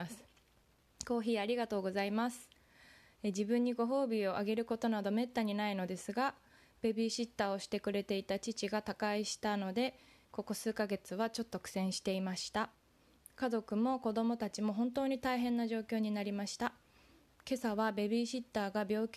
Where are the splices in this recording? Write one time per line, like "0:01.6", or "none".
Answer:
none

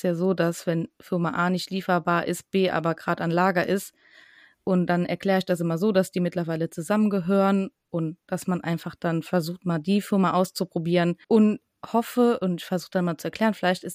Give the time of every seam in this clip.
0:11.2

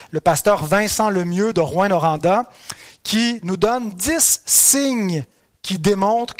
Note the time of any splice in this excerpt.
none

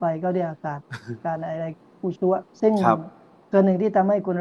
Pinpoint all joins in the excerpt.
0:02.5

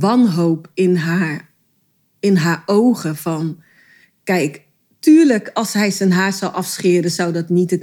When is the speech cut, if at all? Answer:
none

